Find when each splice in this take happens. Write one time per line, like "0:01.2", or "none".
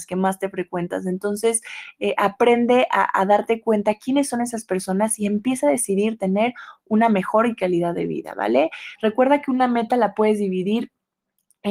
0:09.0